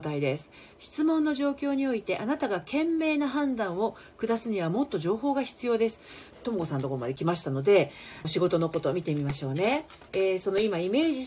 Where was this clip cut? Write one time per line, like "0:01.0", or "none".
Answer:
0:06.3
0:08.2
0:10.1